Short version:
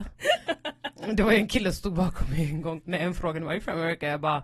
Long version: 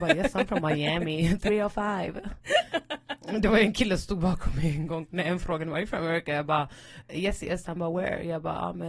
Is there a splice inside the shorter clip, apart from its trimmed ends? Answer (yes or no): no